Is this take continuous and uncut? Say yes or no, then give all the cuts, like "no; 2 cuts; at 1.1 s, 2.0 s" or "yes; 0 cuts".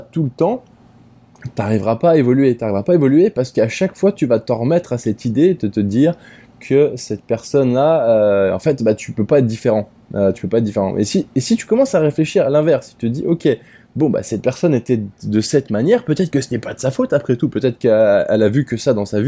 yes; 0 cuts